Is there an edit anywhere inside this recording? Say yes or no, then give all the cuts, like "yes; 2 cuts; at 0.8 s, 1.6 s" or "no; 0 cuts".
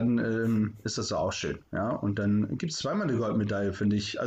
no; 0 cuts